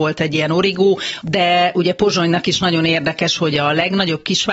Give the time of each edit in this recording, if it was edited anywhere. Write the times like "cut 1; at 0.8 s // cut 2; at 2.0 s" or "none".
cut 1; at 1.2 s // cut 2; at 3.4 s